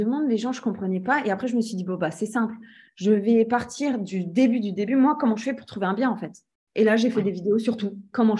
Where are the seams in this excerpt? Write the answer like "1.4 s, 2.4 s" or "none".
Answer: none